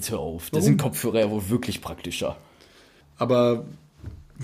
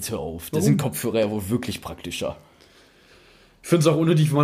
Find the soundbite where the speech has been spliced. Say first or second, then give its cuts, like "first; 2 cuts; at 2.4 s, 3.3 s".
first; 1 cut; at 3.0 s